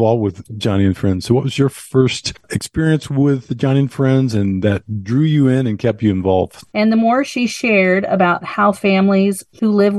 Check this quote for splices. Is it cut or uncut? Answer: cut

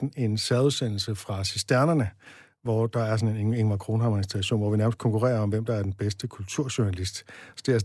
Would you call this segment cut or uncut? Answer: uncut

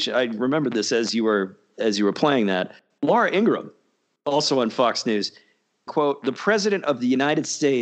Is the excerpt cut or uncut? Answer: cut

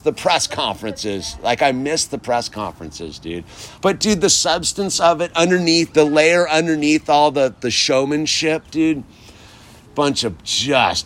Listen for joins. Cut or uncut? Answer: cut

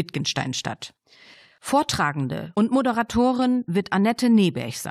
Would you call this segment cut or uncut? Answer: cut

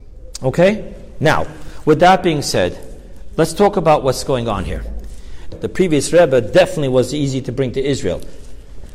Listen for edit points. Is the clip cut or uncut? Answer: cut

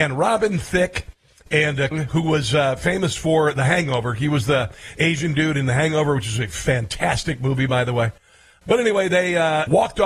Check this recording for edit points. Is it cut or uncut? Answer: cut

